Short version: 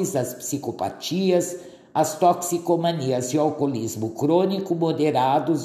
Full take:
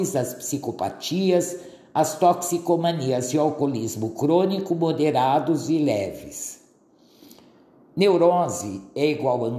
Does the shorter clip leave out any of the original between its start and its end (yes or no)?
no